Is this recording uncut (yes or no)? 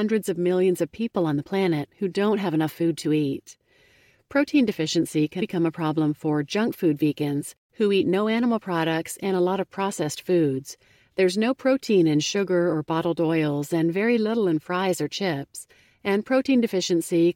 no